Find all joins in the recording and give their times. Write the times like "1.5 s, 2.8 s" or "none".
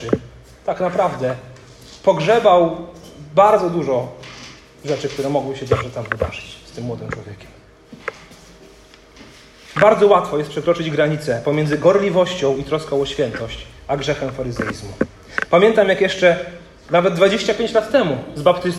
none